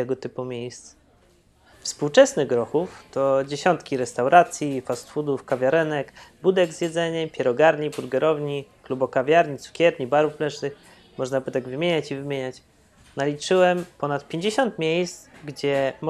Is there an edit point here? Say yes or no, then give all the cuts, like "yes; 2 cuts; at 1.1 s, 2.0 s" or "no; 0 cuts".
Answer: yes; 1 cut; at 1.7 s